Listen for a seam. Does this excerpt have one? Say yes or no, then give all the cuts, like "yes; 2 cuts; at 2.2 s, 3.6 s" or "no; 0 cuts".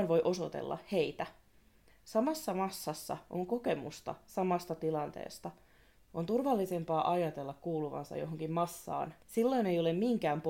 yes; 3 cuts; at 1.9 s, 6.0 s, 9.2 s